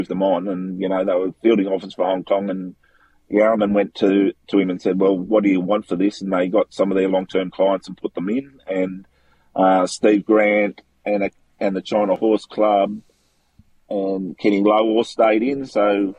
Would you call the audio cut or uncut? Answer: uncut